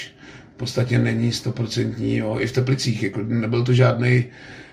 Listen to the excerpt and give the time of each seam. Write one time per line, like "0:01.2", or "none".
none